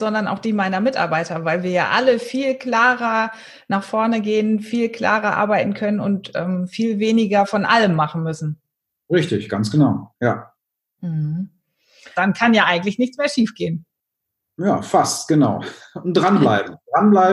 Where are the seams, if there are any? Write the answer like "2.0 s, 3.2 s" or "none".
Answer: 12.1 s